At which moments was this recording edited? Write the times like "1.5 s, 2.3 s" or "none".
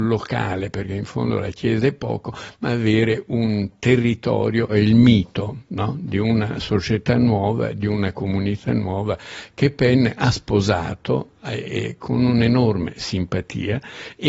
none